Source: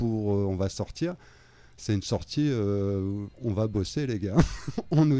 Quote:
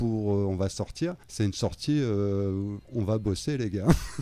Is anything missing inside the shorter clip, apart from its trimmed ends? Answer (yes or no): yes